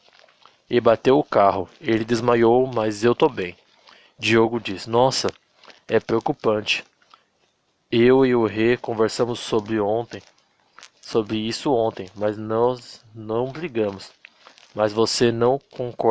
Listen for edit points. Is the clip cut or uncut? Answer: uncut